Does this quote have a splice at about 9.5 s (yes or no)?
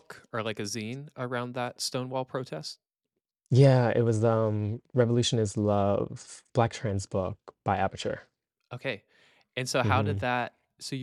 no